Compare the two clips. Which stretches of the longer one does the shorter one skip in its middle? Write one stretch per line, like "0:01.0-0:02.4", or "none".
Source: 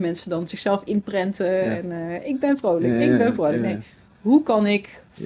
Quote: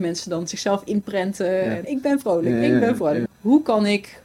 0:01.8-0:02.2
0:03.6-0:04.1